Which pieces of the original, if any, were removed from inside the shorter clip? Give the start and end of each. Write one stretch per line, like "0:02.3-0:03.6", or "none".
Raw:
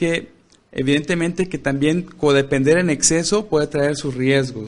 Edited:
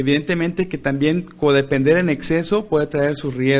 none

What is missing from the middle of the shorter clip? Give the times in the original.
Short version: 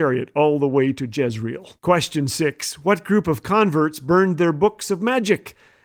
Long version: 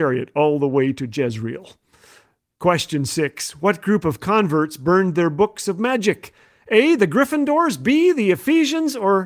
0:01.8-0:02.6

